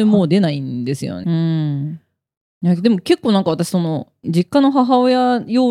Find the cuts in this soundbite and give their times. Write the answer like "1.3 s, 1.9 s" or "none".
1.2 s

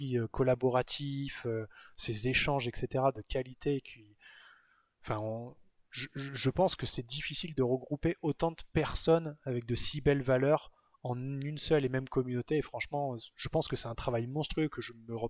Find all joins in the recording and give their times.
none

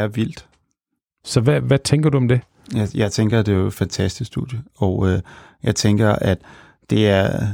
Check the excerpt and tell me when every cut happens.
none

